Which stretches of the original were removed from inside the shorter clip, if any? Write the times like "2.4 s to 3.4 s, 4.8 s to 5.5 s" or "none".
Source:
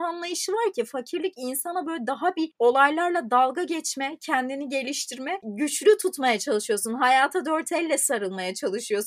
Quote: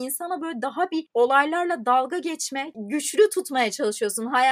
4.2 s to 5.4 s